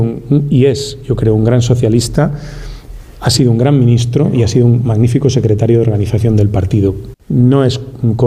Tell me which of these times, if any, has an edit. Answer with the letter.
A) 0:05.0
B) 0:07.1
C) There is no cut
B